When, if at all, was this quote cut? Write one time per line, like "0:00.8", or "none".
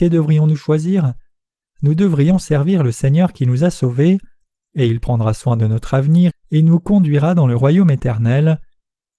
0:06.3